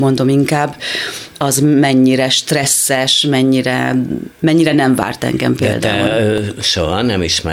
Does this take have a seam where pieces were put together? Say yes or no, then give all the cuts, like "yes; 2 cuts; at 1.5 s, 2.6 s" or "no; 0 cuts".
no; 0 cuts